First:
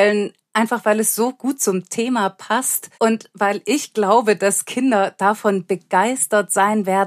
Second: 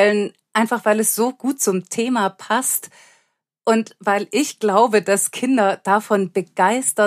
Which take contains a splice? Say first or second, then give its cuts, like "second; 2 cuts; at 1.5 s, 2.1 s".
first; 1 cut; at 2.9 s